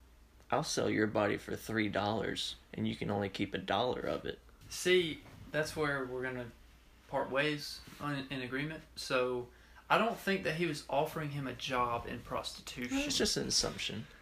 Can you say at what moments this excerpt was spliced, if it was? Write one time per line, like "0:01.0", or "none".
0:04.6